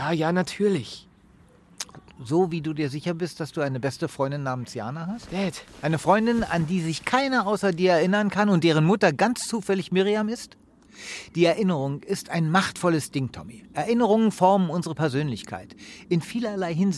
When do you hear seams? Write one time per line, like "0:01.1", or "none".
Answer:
none